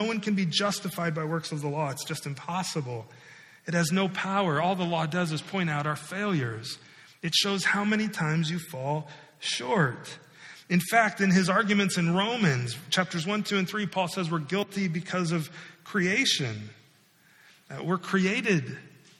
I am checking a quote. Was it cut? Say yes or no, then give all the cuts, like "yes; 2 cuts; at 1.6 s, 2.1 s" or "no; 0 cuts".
no; 0 cuts